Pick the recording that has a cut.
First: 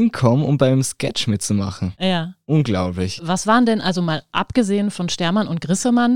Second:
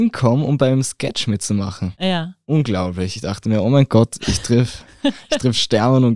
first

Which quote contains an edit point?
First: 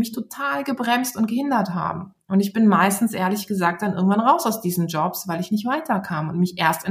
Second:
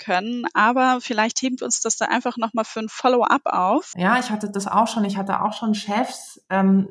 second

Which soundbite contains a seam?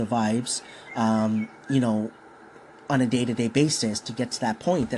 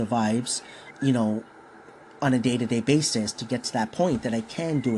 second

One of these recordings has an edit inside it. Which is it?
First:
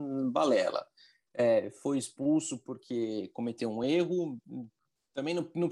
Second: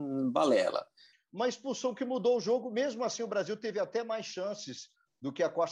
second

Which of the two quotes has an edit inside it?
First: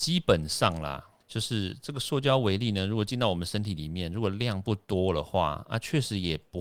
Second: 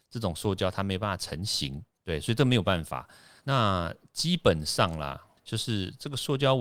second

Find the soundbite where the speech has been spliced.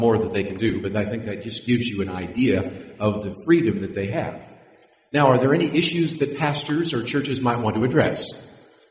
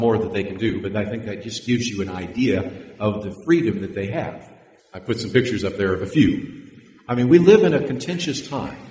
second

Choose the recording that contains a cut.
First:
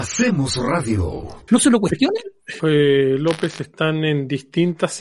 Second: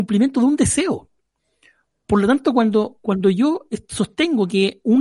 first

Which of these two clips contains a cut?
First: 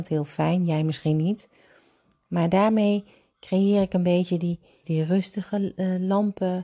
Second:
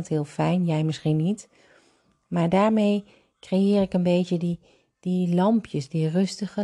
first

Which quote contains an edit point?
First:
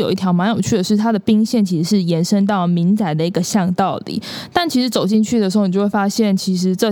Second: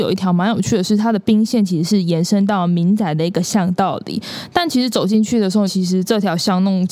second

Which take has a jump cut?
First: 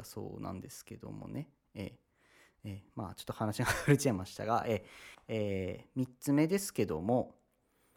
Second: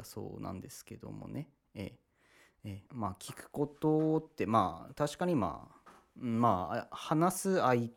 second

